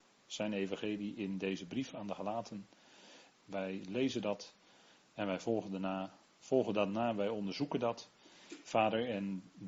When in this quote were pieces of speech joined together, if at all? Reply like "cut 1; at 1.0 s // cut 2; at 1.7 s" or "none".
cut 1; at 3.3 s

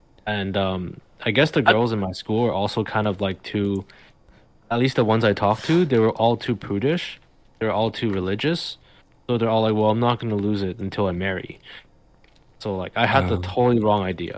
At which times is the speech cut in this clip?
none

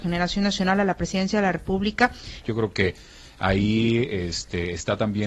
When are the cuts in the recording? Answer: cut 1; at 2.4 s

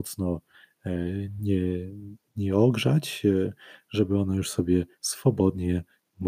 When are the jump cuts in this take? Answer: none

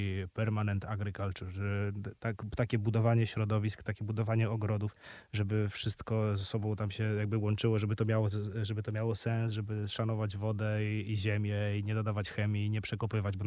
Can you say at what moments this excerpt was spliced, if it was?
none

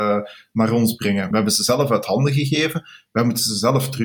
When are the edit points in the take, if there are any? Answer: cut 1; at 1.3 s

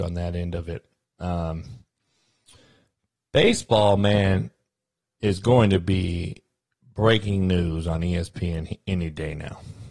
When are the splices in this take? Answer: none

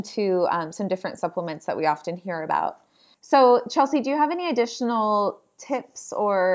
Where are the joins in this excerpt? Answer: none

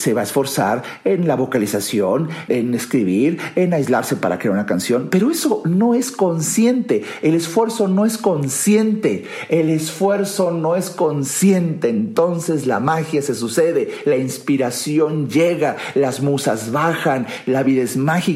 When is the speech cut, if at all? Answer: cut 1; at 2.5 s

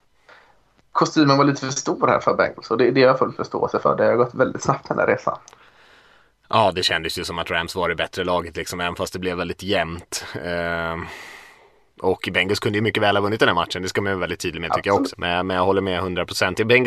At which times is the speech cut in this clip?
cut 1; at 12.8 s // cut 2; at 15.1 s

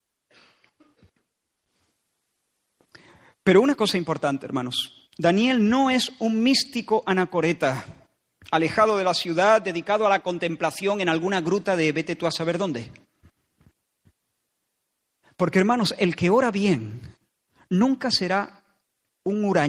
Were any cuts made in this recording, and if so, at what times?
none

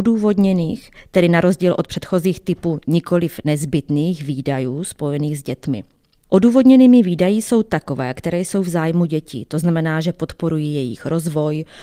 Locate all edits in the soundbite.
none

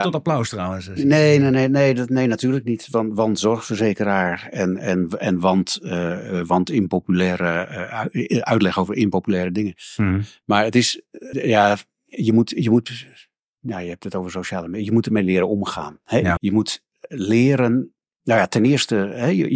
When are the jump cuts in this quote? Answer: cut 1; at 11.3 s // cut 2; at 16.4 s

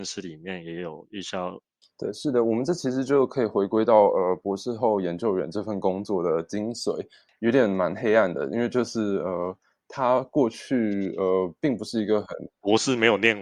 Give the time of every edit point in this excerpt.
cut 1; at 1.8 s

